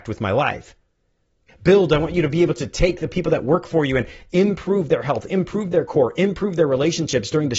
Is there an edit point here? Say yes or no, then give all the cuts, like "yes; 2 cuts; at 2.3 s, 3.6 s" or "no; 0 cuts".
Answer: yes; 1 cut; at 1.5 s